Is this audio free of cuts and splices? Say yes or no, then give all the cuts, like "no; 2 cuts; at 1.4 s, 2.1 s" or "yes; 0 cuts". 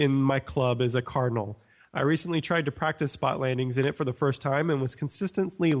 yes; 0 cuts